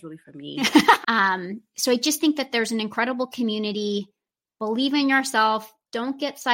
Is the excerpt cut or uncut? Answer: cut